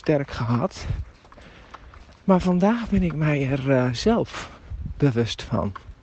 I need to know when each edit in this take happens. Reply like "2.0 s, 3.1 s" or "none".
2.2 s